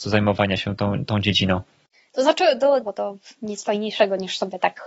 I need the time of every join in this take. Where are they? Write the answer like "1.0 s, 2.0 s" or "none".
2.8 s